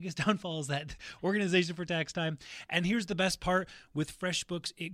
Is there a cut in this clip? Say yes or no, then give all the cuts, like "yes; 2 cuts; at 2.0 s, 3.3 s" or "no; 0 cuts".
no; 0 cuts